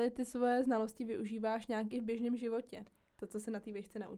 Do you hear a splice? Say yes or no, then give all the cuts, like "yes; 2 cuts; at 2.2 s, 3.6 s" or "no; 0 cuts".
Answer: no; 0 cuts